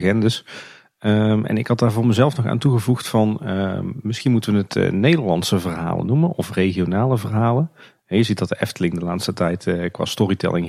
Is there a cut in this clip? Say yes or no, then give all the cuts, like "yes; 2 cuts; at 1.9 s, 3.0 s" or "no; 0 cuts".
no; 0 cuts